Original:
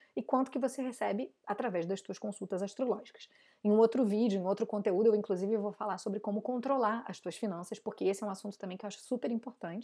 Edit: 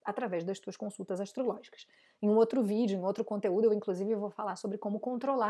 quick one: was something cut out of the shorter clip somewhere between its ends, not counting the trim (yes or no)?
no